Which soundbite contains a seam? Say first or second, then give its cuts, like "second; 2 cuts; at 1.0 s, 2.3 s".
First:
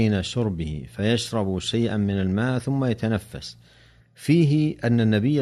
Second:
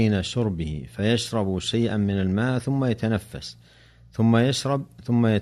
first; 1 cut; at 4.0 s